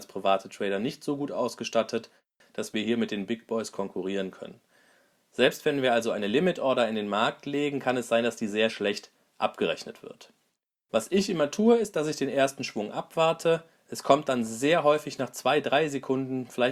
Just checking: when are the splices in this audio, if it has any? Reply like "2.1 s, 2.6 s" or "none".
none